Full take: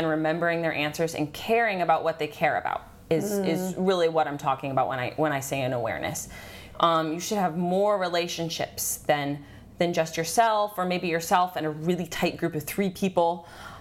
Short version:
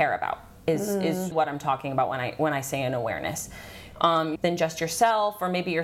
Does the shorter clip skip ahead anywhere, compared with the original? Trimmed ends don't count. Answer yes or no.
yes